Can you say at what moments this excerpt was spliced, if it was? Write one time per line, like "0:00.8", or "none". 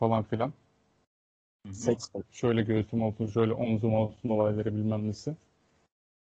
0:02.2